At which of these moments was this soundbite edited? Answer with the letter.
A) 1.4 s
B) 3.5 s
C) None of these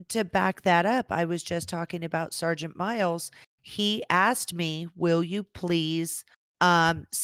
C